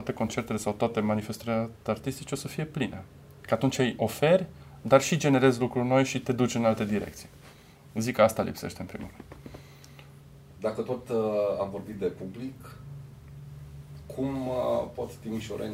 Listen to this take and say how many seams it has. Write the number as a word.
zero